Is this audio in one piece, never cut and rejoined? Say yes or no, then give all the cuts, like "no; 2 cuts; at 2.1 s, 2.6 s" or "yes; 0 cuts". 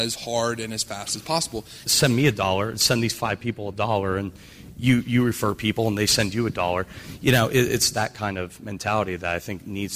no; 1 cut; at 1.8 s